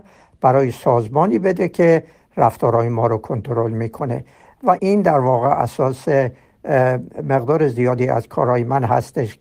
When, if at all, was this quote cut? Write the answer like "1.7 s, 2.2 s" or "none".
4.8 s